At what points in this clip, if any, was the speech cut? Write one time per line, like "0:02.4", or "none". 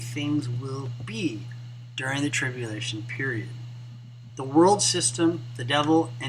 0:04.3